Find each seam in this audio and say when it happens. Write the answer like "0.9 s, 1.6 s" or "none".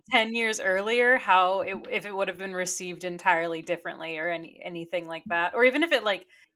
none